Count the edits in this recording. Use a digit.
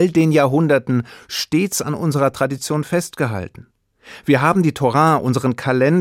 0